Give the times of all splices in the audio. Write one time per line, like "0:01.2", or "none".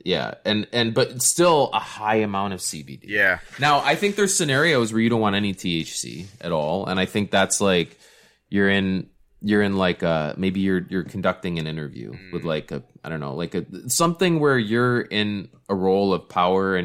none